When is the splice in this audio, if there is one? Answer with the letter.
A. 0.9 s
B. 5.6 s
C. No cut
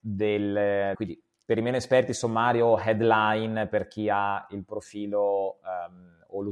A